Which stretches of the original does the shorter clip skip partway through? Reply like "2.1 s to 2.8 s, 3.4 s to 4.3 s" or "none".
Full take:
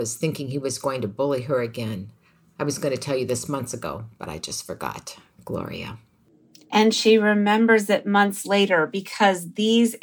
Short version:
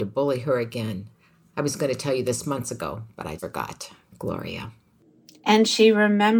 4.4 s to 4.6 s